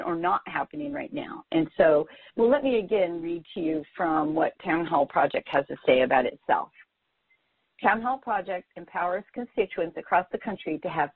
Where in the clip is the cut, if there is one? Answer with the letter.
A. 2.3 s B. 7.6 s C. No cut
A